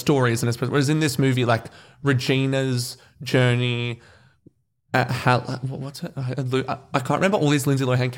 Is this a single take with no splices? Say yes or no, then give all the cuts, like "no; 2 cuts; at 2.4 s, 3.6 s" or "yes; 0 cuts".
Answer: yes; 0 cuts